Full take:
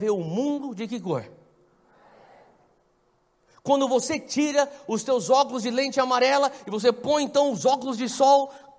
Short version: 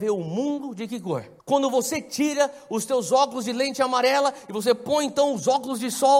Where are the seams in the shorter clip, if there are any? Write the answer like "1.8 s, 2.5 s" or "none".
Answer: 1.4 s